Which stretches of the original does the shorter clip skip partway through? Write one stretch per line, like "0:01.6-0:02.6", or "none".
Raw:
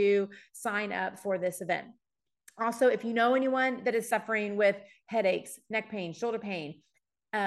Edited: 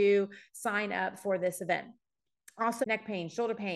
0:02.8-0:05.6